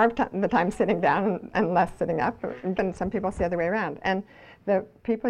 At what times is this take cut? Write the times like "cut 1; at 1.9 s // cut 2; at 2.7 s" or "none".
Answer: cut 1; at 2.7 s